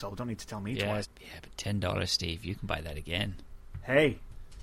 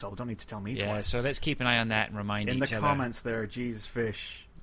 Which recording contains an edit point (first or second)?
first